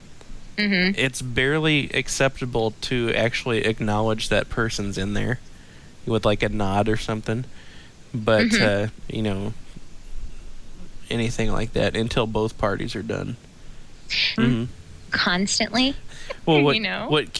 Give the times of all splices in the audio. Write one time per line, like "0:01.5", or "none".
0:09.0
0:14.4
0:16.1